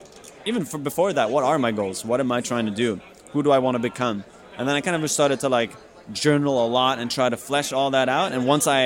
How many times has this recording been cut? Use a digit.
0